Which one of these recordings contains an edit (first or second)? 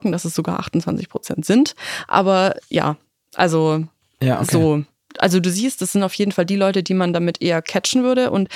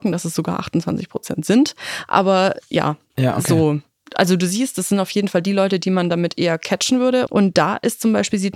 second